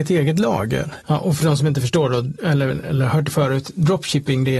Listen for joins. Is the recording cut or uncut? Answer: cut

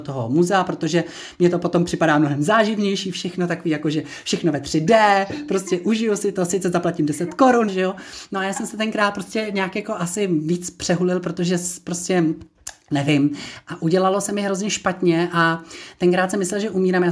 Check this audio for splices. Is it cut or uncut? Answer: cut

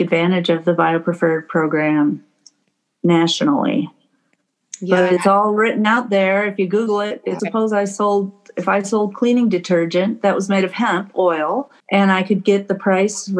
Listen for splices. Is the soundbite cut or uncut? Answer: cut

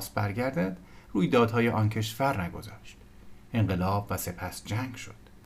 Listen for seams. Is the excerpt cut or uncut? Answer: uncut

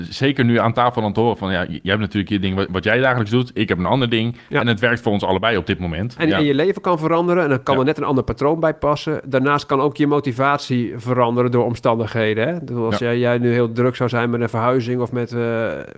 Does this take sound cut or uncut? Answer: cut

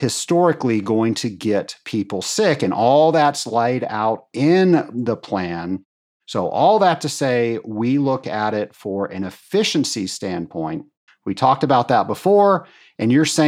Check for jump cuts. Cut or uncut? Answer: cut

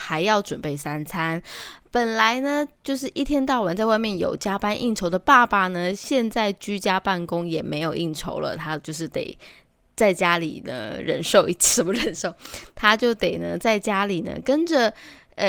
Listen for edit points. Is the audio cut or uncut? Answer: uncut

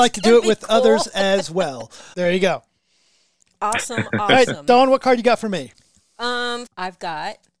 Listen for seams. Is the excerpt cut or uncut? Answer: cut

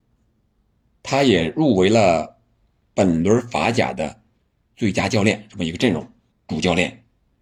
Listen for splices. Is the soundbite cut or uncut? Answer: cut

